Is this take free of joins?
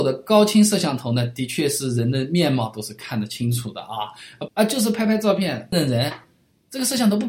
no; 2 cuts; at 4.5 s, 5.7 s

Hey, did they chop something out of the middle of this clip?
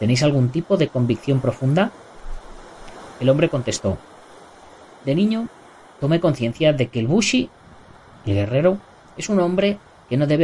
no; 0 cuts

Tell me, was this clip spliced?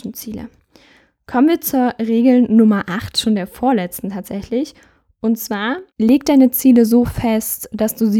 yes; 1 cut; at 5.9 s

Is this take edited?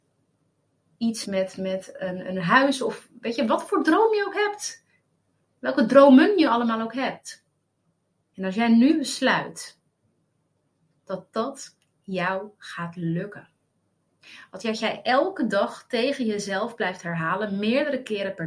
yes; 2 cuts; at 1.2 s, 8.3 s

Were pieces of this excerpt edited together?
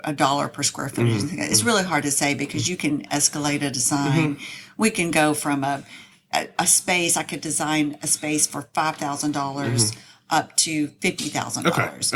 no; 0 cuts

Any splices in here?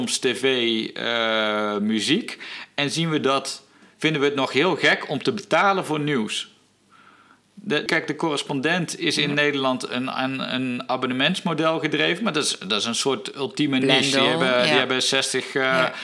yes; 1 cut; at 7.9 s

